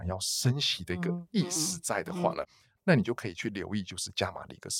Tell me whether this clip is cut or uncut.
uncut